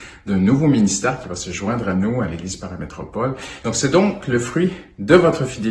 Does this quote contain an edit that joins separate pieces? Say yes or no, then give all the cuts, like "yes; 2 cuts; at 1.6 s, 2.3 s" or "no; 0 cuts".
yes; 1 cut; at 3.6 s